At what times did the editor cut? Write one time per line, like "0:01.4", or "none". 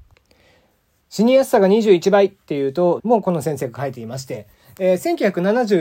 0:03.0